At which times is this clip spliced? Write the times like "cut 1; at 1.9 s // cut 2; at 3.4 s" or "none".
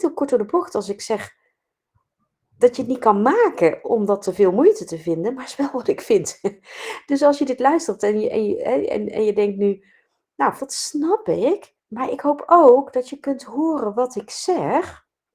cut 1; at 10.6 s // cut 2; at 11.8 s